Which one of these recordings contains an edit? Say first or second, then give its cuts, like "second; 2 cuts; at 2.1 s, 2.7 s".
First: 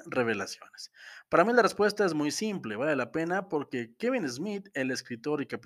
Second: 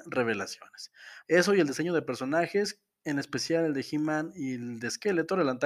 second; 1 cut; at 1.2 s